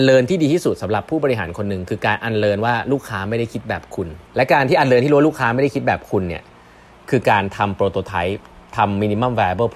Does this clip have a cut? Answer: yes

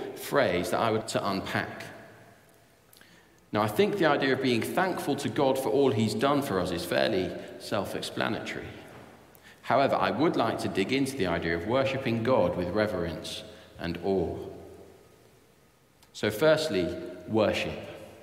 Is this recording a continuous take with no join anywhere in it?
no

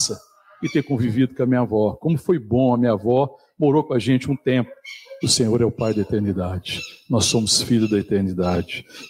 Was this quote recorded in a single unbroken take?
no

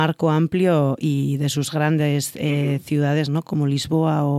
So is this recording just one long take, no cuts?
yes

